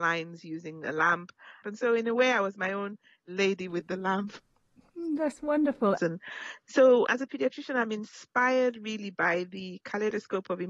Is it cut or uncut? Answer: cut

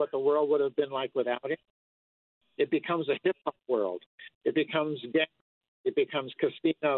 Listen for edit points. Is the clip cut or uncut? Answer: uncut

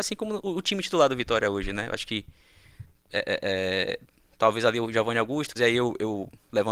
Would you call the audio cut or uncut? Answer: cut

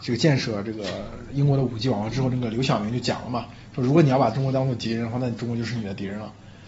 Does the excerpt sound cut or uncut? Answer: uncut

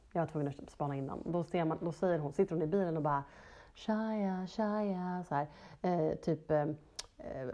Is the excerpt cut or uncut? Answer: uncut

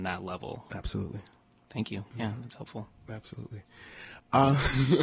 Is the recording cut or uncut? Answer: uncut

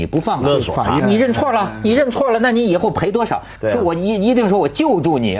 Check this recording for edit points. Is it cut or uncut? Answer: cut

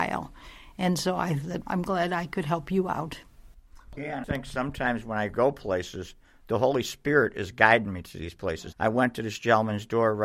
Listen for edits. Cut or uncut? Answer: cut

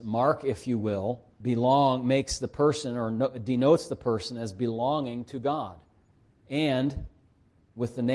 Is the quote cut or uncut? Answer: cut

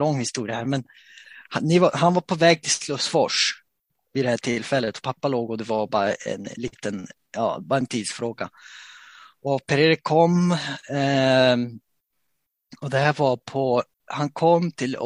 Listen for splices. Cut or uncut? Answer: cut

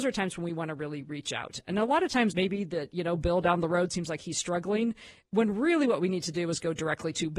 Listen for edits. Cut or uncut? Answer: cut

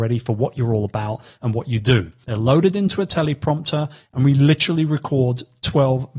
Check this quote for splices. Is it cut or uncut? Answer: cut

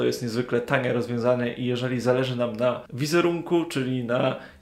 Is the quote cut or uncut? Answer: uncut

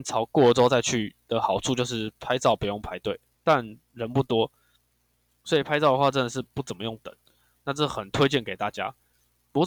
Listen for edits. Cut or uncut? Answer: cut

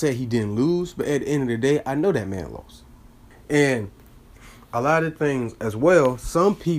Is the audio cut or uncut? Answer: cut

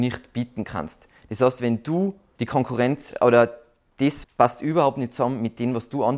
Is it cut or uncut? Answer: cut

